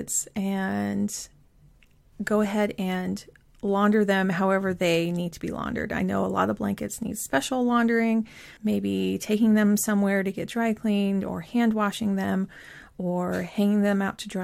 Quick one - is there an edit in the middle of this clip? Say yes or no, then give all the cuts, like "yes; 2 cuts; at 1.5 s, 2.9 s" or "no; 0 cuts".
yes; 1 cut; at 8.6 s